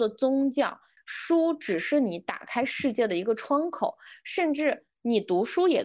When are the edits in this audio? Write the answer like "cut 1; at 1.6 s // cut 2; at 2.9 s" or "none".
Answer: cut 1; at 1.0 s

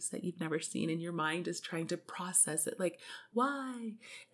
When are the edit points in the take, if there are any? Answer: cut 1; at 3.3 s

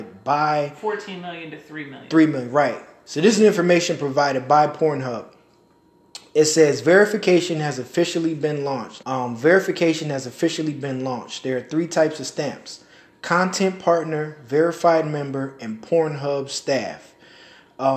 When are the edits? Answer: cut 1; at 9.0 s

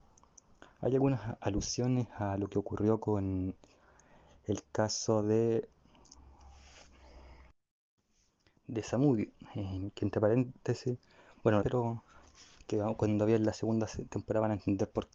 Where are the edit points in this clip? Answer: cut 1; at 11.6 s

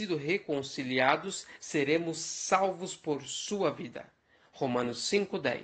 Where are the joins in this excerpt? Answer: none

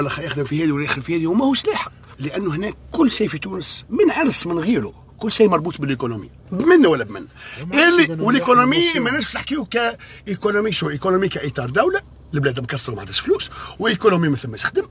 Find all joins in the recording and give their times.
cut 1; at 2.1 s // cut 2; at 6.4 s

